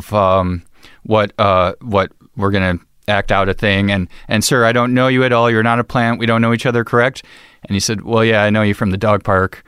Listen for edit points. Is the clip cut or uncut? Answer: uncut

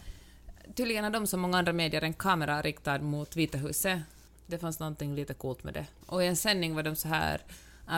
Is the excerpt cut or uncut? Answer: cut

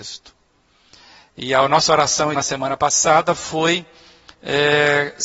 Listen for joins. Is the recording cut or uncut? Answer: cut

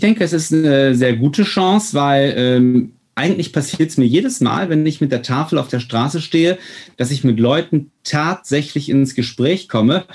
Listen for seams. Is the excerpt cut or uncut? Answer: uncut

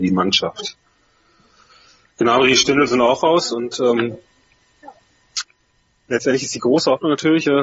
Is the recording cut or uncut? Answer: uncut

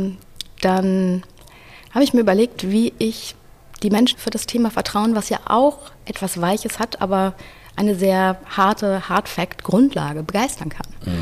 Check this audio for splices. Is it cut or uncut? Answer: cut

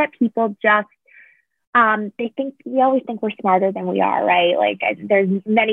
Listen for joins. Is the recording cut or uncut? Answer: uncut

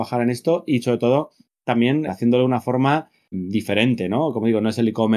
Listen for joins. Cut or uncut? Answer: cut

